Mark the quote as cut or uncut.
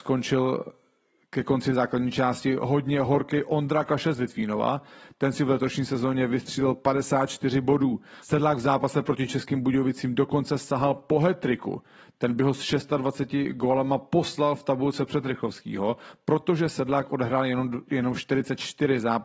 cut